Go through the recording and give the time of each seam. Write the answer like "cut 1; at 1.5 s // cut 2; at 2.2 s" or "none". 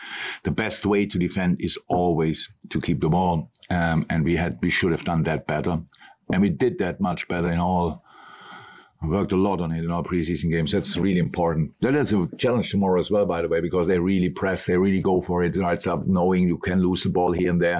cut 1; at 15.5 s